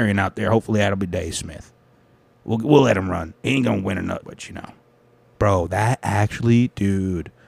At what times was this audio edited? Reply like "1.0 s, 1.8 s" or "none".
4.2 s